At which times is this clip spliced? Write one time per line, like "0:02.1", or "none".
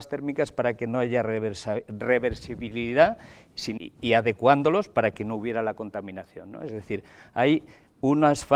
0:03.8